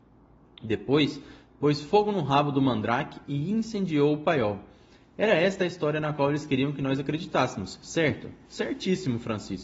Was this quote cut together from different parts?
yes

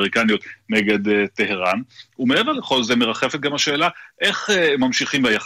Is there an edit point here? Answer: no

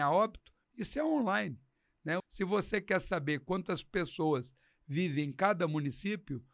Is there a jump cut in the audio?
yes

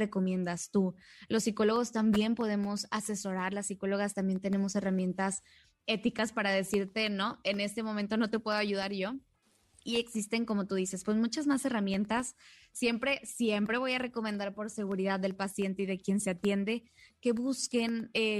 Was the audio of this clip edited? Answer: no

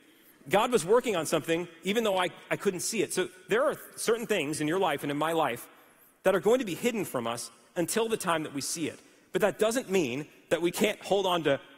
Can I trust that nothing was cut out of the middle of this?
yes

